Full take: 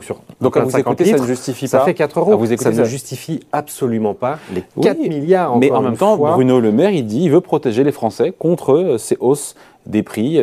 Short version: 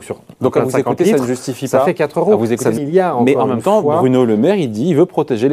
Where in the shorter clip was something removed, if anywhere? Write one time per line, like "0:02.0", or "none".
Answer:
0:02.8